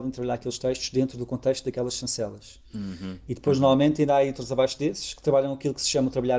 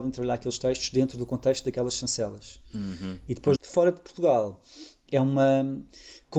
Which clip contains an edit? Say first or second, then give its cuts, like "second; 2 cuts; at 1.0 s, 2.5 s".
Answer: second; 1 cut; at 3.6 s